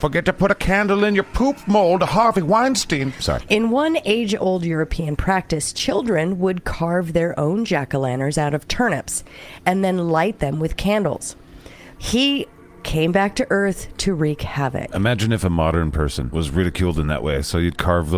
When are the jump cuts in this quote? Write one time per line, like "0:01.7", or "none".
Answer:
0:12.0